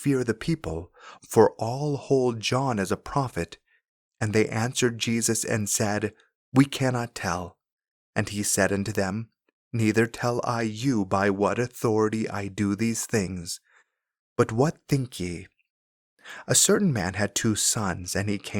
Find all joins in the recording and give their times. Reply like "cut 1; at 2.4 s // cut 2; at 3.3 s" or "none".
none